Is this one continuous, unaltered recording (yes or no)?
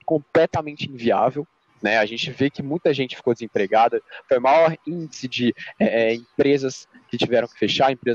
no